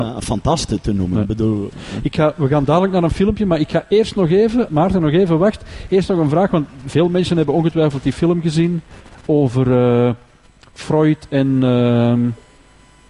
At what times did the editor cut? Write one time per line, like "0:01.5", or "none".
0:04.7